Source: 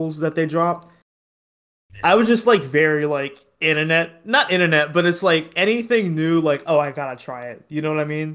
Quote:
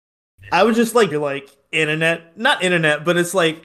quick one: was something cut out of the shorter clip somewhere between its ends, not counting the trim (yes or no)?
yes